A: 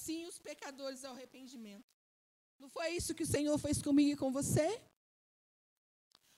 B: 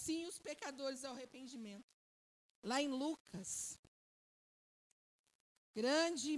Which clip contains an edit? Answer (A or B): B